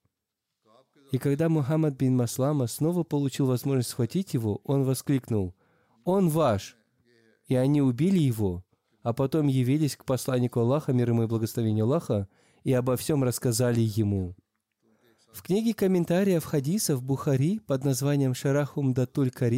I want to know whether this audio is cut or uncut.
uncut